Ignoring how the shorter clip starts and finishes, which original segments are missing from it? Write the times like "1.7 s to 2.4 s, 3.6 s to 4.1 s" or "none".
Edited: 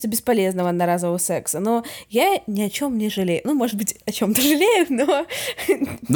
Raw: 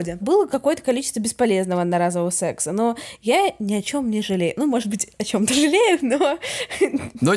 none